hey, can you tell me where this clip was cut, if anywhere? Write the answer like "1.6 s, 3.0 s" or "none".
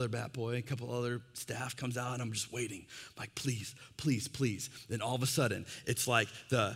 none